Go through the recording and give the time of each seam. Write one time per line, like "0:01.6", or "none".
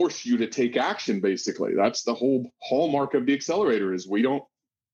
none